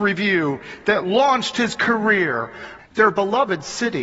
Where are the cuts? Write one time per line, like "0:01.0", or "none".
0:02.8